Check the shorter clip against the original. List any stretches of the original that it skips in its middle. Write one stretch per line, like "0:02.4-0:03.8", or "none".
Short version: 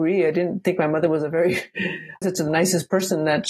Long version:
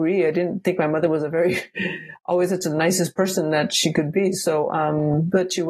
0:02.2-0:02.5